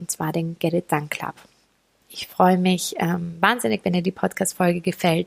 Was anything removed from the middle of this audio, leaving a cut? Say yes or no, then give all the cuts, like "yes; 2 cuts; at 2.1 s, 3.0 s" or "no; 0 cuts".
yes; 1 cut; at 2.0 s